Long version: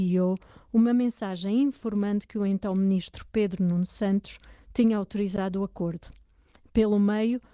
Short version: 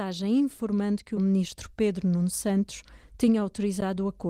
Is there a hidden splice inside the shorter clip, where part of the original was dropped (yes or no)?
yes